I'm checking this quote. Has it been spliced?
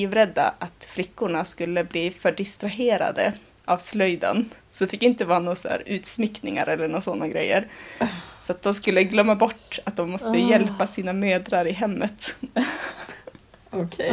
no; 0 cuts

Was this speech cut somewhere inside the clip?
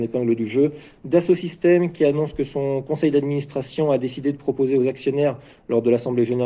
yes; 1 cut; at 1.0 s

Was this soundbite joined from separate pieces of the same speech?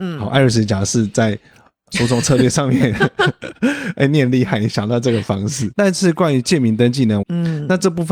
yes; 2 cuts; at 5.7 s, 7.2 s

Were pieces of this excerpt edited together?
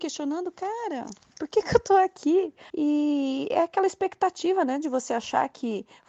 yes; 1 cut; at 2.7 s

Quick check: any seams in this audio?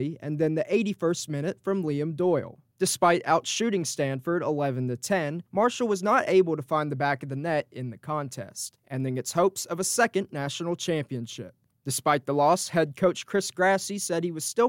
no; 0 cuts

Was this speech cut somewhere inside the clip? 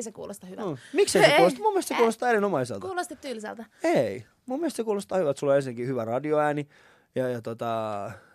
no; 0 cuts

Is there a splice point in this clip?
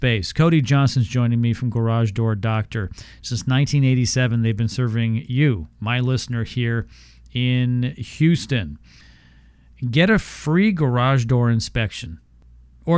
no; 0 cuts

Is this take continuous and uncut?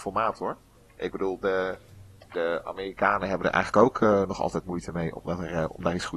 yes; 0 cuts

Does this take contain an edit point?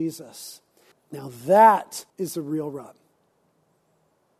yes; 2 cuts; at 0.9 s, 2.1 s

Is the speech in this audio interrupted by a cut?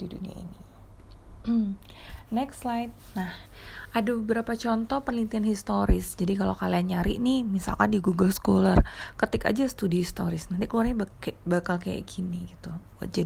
no; 0 cuts

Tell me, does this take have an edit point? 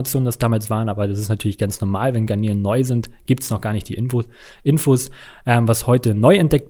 no; 0 cuts

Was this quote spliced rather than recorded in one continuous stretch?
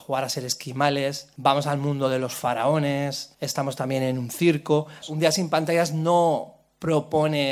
yes; 1 cut; at 5.0 s

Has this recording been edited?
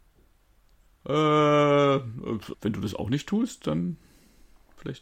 yes; 1 cut; at 2.5 s

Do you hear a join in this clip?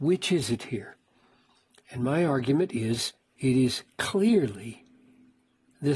no; 0 cuts

